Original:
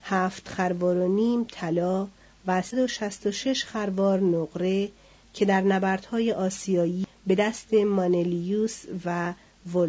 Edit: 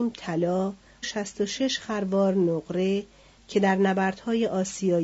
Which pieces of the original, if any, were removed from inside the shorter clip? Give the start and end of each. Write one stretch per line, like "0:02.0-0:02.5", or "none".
0:02.4-0:02.9